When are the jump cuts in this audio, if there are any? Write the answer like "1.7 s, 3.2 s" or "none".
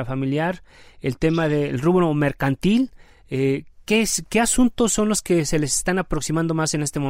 none